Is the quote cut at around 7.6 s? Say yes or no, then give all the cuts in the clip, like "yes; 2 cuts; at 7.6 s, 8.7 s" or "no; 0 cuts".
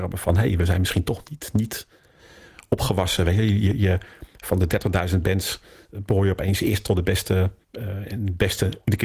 yes; 1 cut; at 7.6 s